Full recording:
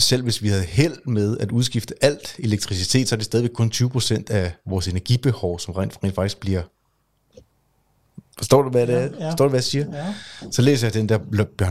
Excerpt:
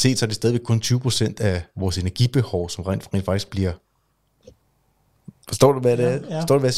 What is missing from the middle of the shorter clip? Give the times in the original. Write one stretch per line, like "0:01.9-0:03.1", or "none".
none